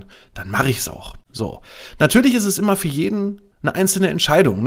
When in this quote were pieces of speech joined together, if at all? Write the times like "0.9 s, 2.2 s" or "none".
none

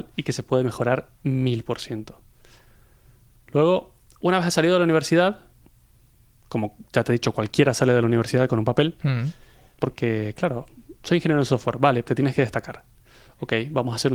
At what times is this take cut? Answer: 9.7 s, 12.0 s

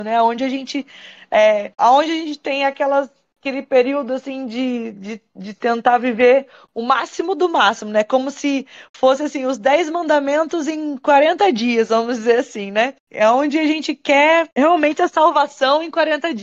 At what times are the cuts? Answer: 13.0 s

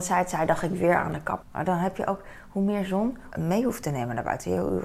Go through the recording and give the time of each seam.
1.4 s, 3.3 s

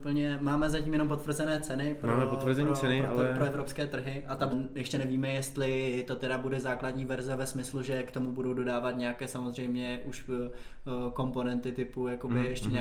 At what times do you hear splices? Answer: 4.5 s

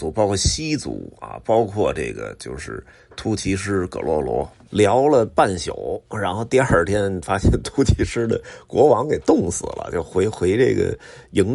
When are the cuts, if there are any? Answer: 4.7 s

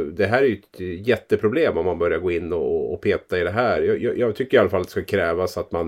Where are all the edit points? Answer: none

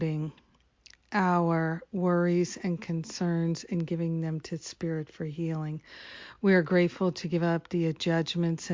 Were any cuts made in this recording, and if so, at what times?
none

